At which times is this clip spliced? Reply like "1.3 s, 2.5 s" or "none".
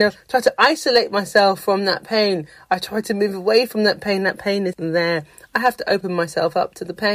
4.7 s